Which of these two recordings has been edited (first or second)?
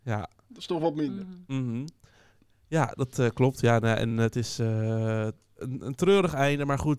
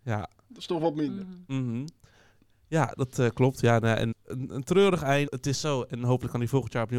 second